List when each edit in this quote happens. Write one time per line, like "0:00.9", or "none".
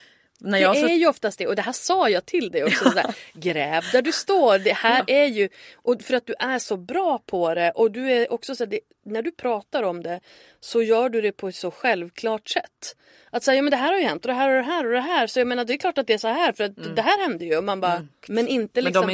0:18.2